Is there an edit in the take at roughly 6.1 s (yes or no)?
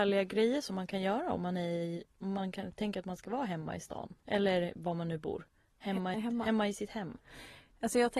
yes